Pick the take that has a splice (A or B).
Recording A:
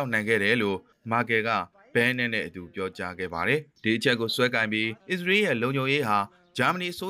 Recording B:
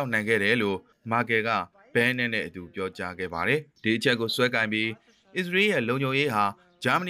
A